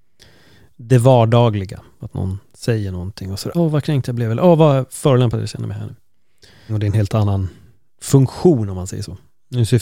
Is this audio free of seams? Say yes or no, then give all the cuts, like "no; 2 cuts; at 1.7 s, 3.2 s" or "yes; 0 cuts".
no; 2 cuts; at 3.5 s, 6.7 s